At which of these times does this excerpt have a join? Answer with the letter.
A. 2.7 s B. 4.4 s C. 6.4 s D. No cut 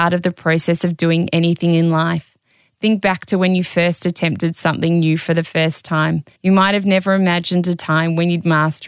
C